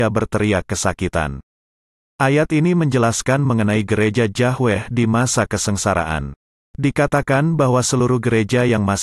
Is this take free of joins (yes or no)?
yes